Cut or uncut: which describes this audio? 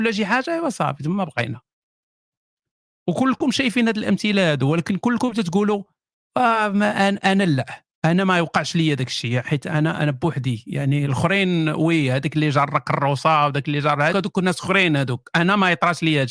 cut